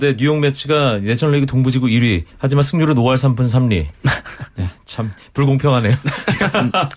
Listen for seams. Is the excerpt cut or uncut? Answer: cut